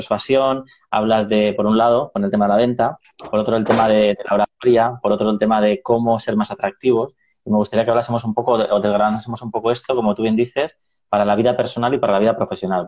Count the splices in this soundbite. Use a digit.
0